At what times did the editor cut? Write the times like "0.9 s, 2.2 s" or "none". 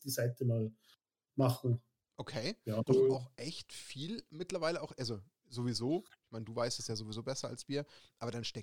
2.9 s